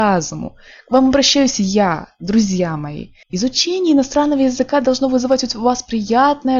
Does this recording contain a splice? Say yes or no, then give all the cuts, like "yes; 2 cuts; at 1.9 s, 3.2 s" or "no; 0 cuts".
yes; 1 cut; at 3.2 s